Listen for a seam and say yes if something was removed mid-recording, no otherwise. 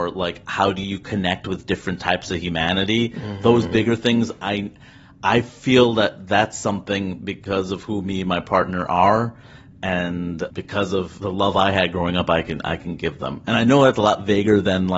no